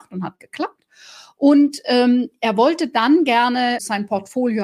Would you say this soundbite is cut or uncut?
uncut